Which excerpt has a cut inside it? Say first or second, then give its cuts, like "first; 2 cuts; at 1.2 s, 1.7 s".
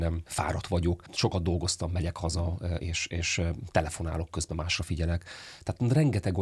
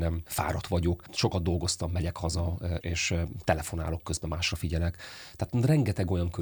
second; 1 cut; at 2.8 s